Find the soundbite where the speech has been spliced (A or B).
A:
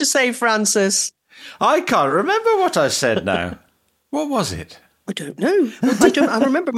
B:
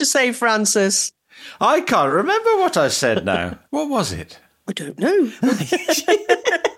B